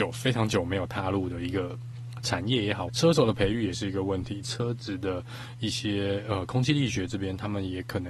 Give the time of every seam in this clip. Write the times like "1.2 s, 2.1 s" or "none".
2.9 s, 4.4 s